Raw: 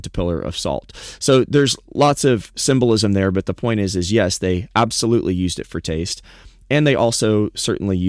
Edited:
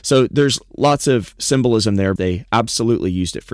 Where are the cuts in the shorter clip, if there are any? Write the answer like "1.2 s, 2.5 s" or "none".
2.2 s